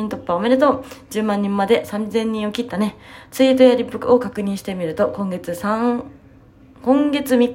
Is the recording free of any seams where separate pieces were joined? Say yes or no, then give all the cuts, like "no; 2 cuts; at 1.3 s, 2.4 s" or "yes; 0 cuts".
yes; 0 cuts